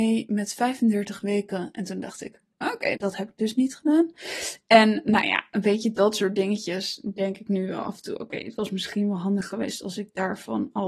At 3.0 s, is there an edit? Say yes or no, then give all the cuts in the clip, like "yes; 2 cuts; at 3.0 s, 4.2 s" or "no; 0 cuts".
yes; 1 cut; at 3.0 s